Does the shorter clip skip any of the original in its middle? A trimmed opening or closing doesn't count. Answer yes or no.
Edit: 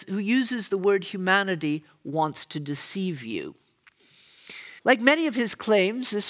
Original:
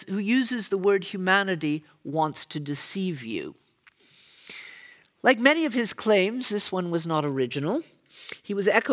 yes